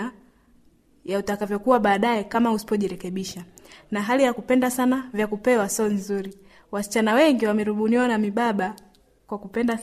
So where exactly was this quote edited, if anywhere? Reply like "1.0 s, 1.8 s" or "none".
none